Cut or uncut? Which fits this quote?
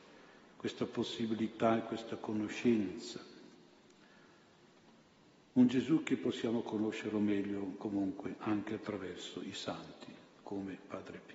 uncut